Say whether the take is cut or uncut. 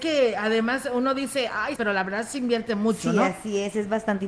cut